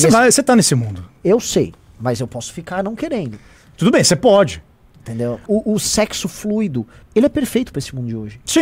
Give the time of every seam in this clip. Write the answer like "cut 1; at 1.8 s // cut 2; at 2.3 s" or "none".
cut 1; at 5.5 s // cut 2; at 7.0 s